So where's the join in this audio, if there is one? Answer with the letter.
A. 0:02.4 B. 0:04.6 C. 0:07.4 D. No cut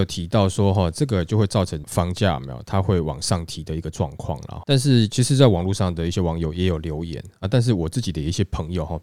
D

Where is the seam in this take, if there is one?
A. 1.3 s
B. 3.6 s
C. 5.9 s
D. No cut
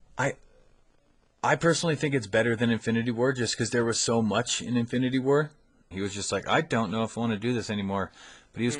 C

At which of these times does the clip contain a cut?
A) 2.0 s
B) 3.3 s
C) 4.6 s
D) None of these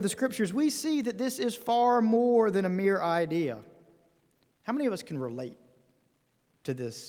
C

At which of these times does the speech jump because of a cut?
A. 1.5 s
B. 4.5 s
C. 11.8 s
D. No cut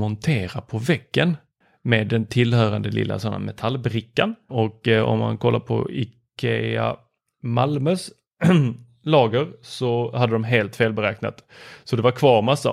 B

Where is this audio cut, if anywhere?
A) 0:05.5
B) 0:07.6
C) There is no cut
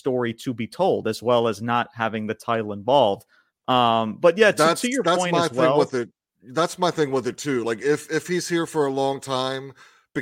C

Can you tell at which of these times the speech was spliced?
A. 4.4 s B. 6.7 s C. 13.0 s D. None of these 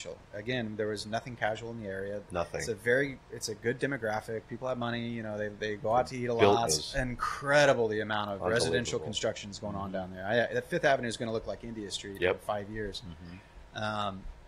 B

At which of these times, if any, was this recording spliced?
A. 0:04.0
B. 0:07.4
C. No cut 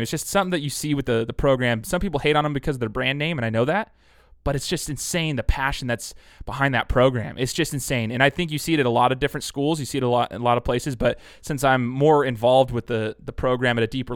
C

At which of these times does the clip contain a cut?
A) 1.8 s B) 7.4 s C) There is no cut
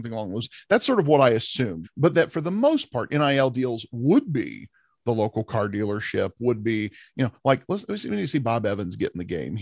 A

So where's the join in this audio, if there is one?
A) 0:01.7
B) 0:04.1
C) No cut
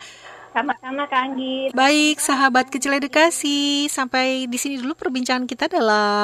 A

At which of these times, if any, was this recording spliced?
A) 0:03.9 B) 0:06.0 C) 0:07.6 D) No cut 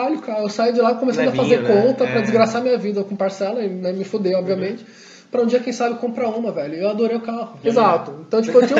C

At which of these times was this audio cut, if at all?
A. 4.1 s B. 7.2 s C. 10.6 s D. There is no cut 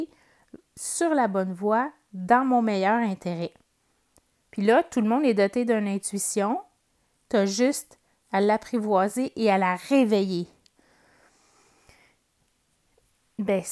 D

